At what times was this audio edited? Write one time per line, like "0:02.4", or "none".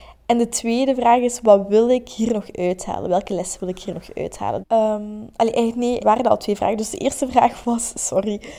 0:04.6
0:06.0

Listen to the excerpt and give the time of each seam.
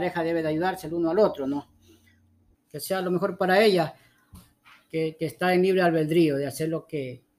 0:02.5

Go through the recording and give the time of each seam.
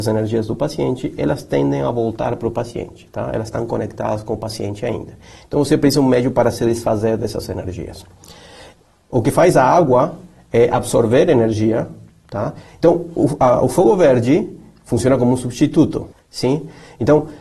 0:12.7
0:16.1

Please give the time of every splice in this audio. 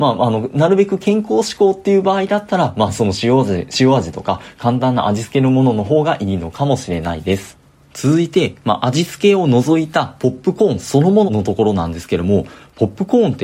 0:11.3

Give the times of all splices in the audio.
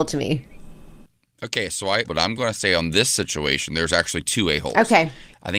0:02.0

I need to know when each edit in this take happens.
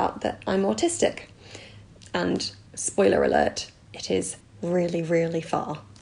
0:02.0

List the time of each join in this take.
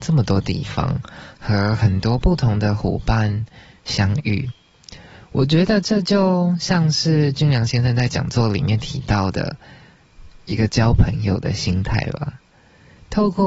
none

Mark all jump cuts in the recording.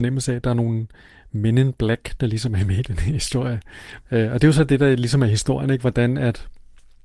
0:04.0

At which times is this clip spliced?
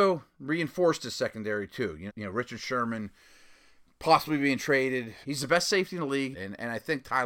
0:02.1
0:05.2
0:06.3

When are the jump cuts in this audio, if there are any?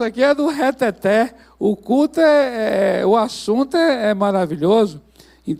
none

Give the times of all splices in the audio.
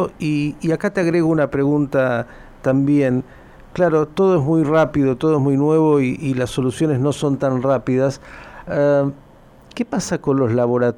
none

